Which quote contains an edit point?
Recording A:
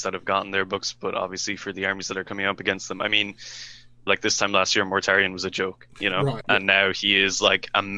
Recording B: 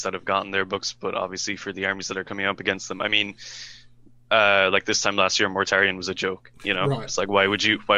A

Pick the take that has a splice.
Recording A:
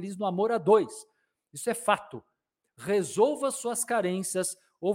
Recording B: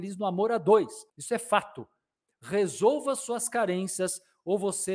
B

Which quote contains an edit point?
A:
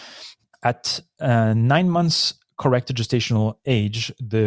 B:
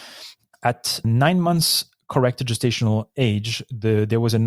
B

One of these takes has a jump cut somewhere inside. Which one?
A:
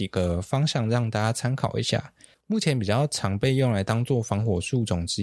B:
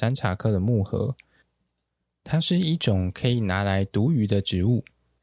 A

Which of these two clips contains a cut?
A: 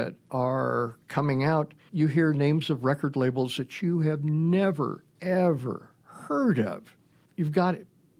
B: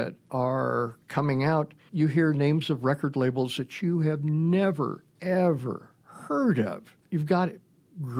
B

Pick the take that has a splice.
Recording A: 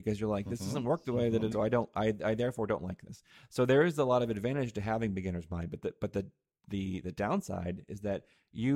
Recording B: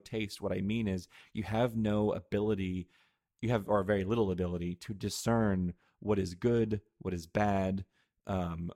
A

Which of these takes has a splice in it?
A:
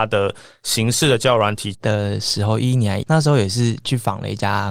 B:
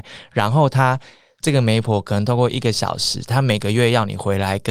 A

